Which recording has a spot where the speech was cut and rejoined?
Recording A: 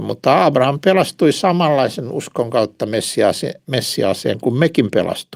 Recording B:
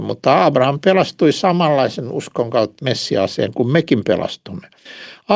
B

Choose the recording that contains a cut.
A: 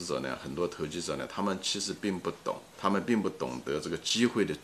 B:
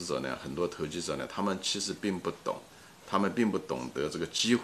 A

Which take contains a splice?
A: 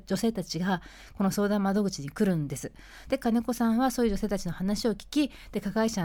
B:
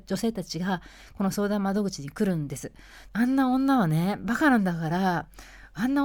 B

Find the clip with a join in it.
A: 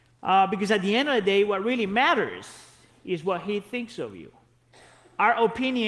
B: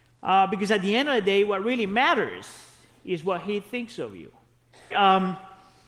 B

